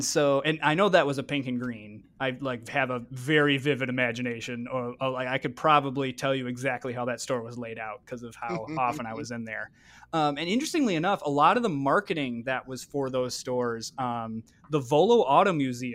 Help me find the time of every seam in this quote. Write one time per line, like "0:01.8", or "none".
none

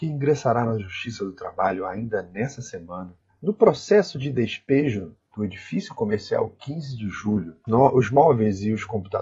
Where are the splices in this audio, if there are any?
0:03.3
0:07.7

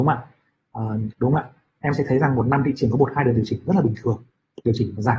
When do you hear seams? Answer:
0:01.1

